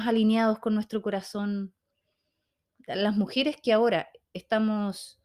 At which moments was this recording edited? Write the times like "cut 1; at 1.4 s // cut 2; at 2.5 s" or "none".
none